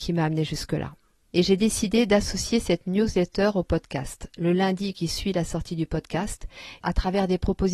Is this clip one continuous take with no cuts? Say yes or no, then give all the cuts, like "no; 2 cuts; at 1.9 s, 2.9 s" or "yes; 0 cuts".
no; 3 cuts; at 1.3 s, 4.3 s, 6.8 s